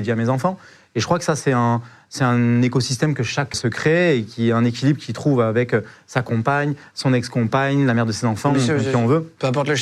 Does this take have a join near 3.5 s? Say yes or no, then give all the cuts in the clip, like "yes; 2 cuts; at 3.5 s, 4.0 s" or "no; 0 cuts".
yes; 1 cut; at 3.5 s